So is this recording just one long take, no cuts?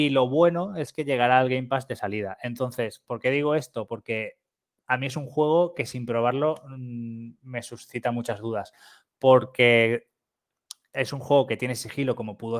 yes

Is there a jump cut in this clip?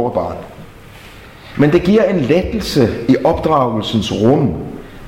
yes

